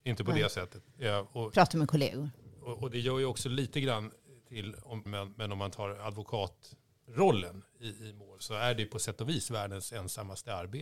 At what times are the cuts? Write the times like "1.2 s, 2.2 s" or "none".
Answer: 5.1 s, 8.4 s

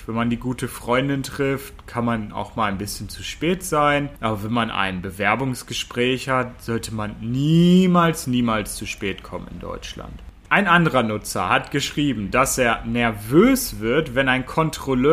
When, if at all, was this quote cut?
8.2 s

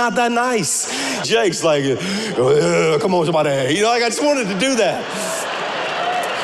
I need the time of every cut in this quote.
1.2 s

